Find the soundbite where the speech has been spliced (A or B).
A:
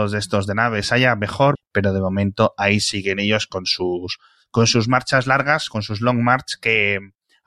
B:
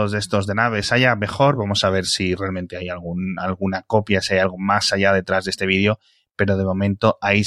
A